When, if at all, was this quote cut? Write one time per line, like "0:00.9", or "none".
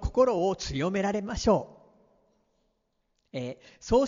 none